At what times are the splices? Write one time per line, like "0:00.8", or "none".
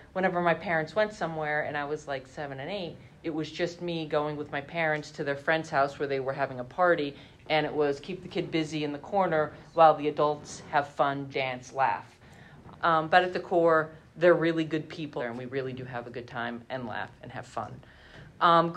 0:11.3
0:12.7
0:15.2

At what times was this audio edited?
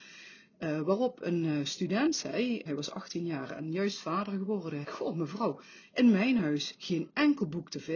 0:02.7
0:04.8

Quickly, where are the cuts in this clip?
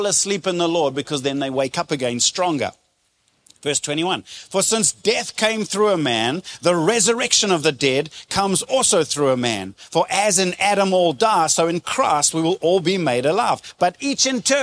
none

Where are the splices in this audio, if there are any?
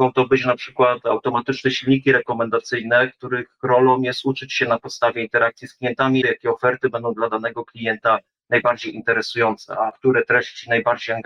0:06.2

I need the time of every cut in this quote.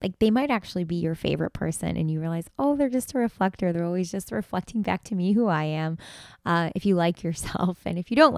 none

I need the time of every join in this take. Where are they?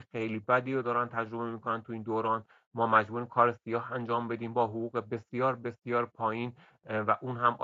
none

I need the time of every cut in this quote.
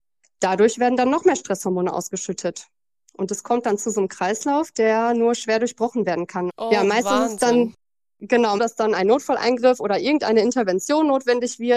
0:06.5
0:08.6

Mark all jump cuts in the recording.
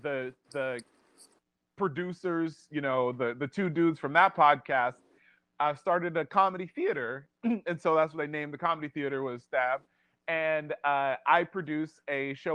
none

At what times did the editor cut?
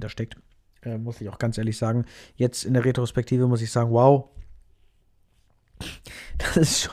none

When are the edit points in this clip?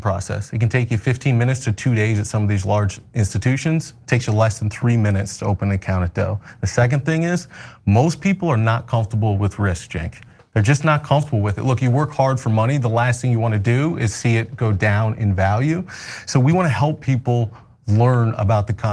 none

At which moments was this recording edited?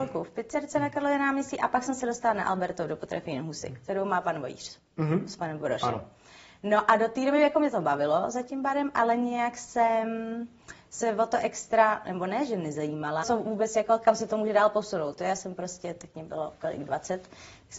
0:13.2

